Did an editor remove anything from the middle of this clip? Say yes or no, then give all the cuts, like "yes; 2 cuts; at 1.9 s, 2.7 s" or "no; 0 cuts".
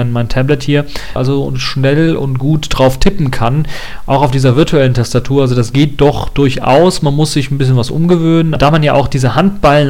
yes; 2 cuts; at 1.2 s, 8.6 s